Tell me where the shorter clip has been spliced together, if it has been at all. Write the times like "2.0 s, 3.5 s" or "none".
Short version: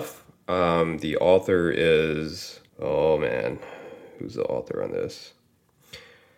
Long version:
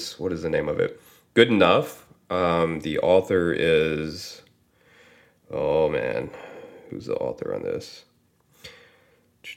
2.7 s